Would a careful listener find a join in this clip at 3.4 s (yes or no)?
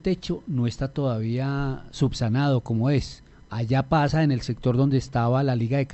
no